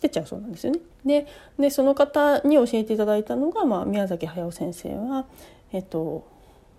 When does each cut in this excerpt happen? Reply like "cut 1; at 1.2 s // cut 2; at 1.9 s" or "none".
cut 1; at 0.9 s